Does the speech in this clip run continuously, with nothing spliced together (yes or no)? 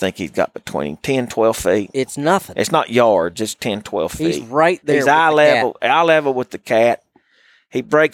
yes